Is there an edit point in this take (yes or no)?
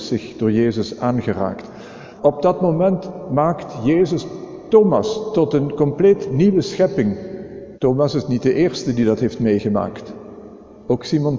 yes